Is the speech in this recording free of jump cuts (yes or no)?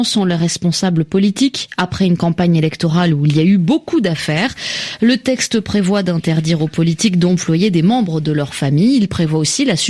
yes